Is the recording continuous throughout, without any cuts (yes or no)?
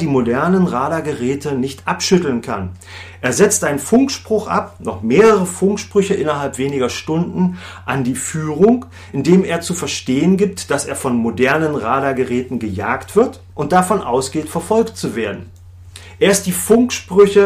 yes